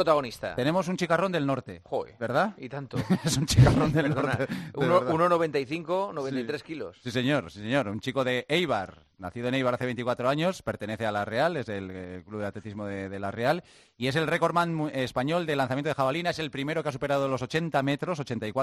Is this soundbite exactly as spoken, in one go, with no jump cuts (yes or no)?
yes